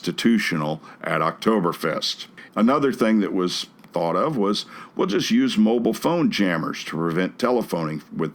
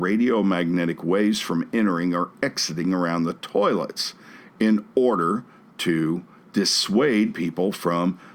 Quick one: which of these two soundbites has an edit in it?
first; 1 cut; at 2.5 s

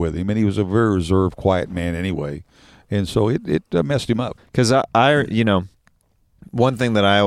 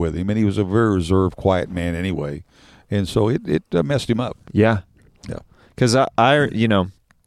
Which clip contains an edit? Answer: first; 1 cut; at 4.4 s

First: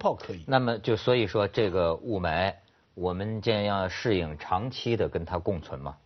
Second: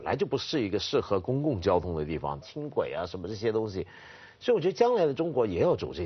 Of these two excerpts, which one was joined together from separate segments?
second; 1 cut; at 2.4 s

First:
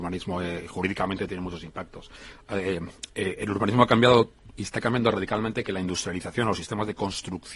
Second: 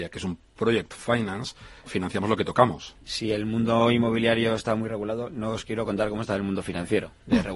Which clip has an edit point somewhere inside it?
second; 2 cuts; at 1.9 s, 2.9 s

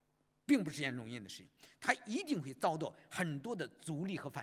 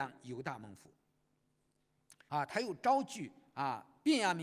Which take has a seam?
second; 1 cut; at 2.3 s

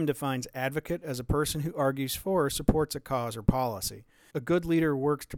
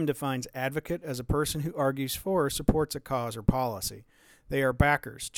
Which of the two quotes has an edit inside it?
first; 1 cut; at 4.3 s

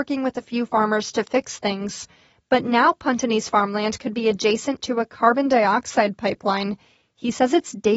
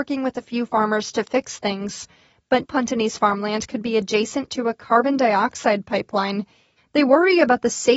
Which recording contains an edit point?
second; 2 cuts; at 2.6 s, 6.8 s

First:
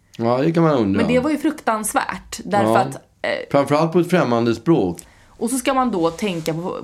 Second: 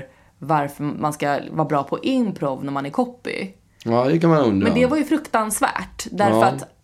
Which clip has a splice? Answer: first; 1 cut; at 5.0 s

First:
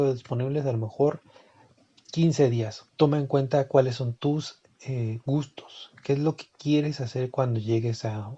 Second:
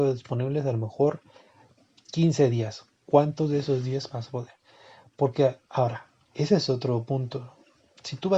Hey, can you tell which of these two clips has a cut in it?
first; 1 cut; at 2.9 s

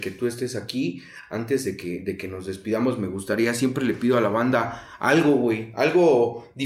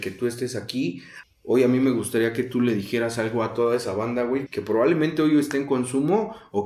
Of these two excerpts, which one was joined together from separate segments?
second; 2 cuts; at 1.2 s, 4.5 s

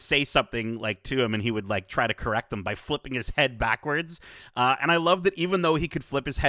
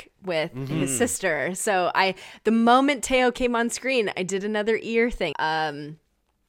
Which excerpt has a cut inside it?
second; 1 cut; at 5.3 s

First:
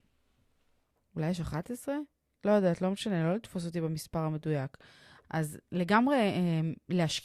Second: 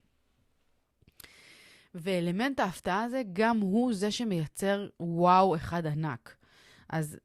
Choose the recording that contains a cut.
first; 2 cuts; at 1.0 s, 5.2 s

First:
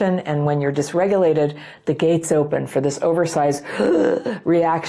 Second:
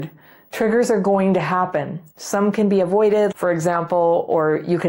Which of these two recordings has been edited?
second; 1 cut; at 3.3 s

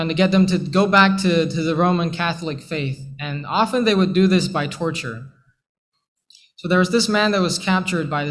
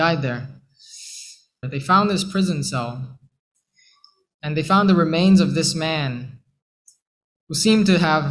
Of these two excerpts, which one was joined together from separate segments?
second; 1 cut; at 1.6 s

